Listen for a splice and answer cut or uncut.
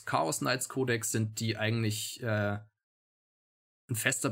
uncut